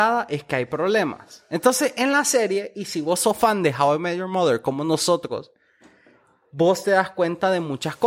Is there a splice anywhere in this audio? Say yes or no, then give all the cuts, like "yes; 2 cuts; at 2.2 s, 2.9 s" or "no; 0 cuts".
no; 0 cuts